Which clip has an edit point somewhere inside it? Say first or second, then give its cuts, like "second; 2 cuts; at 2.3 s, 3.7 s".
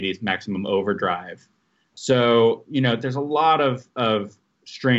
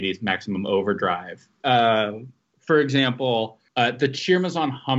second; 2 cuts; at 1.6 s, 3.7 s